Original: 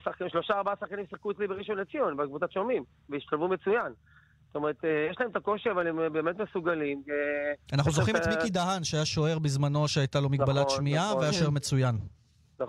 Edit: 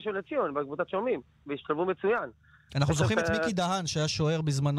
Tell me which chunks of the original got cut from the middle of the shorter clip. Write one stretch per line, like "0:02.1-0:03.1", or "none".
0:04.3-0:07.7